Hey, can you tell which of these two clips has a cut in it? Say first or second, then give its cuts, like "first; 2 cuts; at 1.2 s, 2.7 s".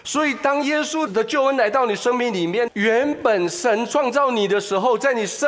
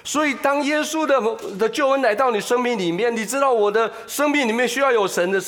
first; 2 cuts; at 1.1 s, 2.7 s